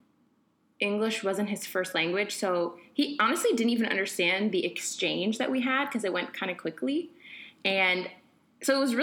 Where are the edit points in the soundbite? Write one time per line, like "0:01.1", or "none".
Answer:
none